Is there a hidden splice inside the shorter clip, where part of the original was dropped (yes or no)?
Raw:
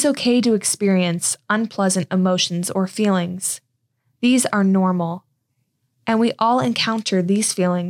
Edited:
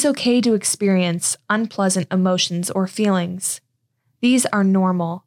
no